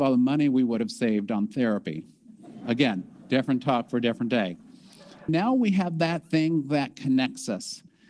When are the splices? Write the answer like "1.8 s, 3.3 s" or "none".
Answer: 5.3 s